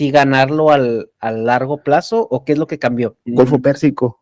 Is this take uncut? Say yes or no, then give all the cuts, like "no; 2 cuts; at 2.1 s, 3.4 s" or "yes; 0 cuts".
no; 1 cut; at 3.3 s